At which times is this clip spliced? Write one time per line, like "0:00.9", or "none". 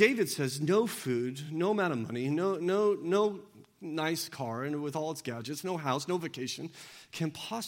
none

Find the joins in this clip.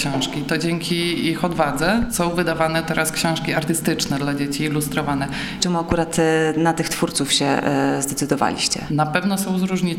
0:05.6
0:08.9

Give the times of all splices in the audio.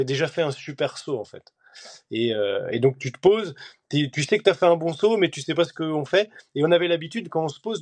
none

